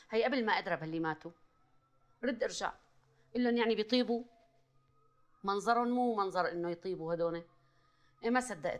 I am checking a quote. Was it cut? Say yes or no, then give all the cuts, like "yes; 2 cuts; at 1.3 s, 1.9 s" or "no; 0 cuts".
no; 0 cuts